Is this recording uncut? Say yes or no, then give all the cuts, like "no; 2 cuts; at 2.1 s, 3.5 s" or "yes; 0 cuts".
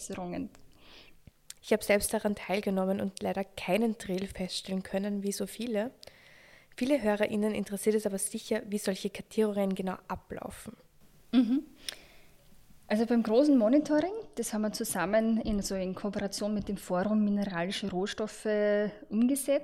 no; 1 cut; at 1.6 s